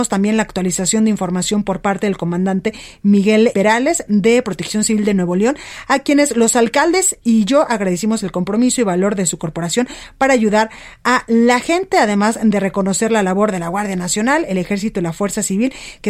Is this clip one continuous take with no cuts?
no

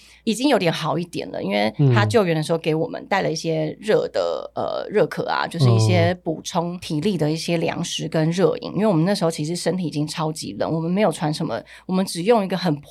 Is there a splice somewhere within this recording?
yes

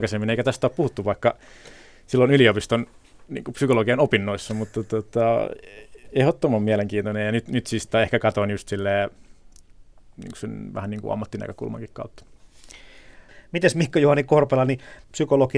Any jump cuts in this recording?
no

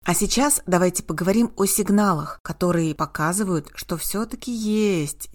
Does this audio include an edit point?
no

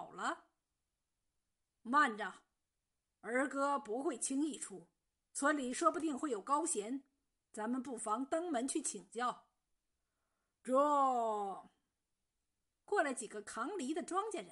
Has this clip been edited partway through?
yes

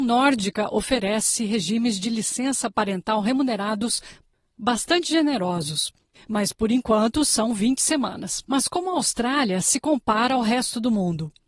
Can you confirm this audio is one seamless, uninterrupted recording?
no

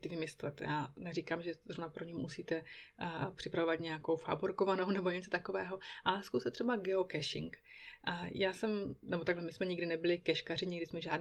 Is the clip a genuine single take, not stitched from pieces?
yes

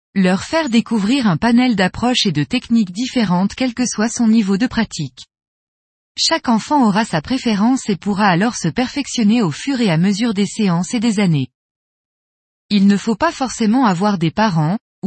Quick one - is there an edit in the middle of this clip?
no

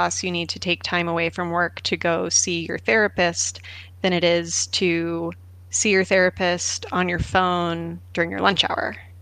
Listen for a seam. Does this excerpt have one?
no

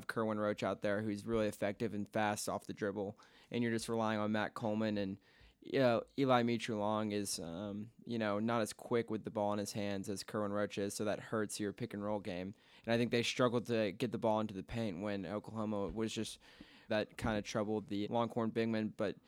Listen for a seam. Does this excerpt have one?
yes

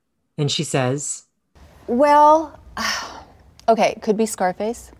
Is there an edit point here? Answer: no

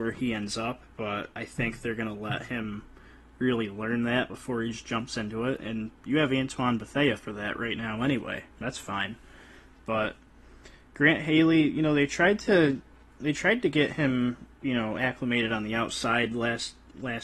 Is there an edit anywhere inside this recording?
yes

